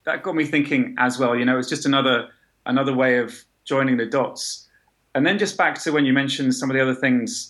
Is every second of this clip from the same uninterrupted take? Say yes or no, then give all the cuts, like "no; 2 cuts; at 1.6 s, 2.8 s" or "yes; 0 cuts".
yes; 0 cuts